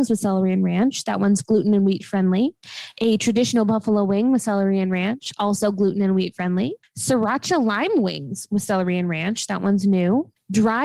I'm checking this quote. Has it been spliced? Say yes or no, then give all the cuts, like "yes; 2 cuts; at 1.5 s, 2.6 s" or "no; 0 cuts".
no; 0 cuts